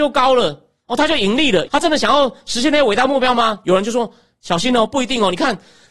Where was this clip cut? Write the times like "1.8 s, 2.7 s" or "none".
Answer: 1.7 s